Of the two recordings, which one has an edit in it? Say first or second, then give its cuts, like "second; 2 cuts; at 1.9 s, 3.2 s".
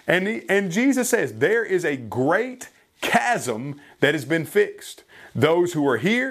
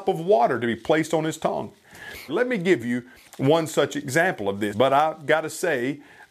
second; 2 cuts; at 2.3 s, 4.7 s